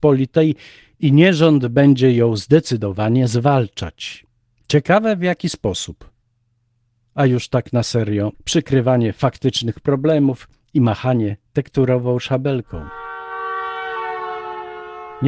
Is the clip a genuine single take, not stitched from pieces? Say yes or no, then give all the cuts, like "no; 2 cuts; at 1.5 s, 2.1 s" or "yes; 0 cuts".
no; 1 cut; at 8.3 s